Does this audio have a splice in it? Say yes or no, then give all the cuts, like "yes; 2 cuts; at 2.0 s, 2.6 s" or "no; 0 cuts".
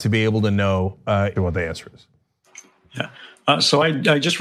yes; 1 cut; at 1.4 s